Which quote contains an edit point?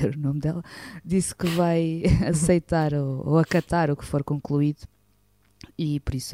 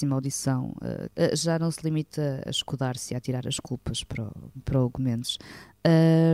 second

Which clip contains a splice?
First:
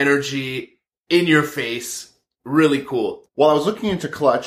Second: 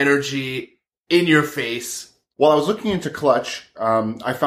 second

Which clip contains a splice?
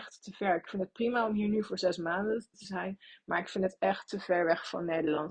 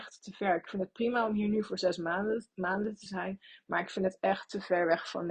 first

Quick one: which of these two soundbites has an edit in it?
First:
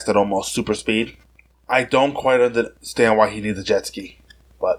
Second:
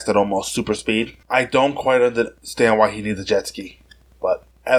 second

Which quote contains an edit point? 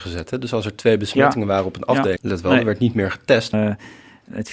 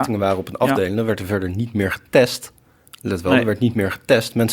first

